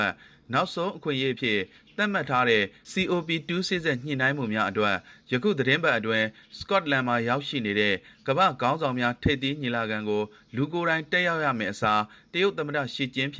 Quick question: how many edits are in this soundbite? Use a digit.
1